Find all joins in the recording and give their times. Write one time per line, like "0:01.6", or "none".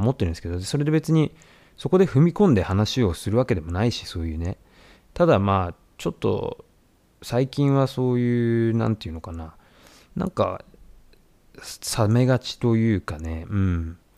none